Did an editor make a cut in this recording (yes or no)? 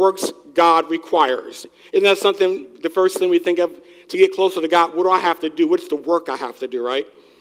no